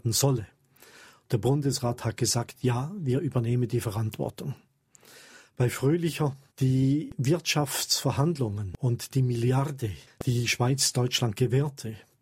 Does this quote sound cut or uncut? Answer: uncut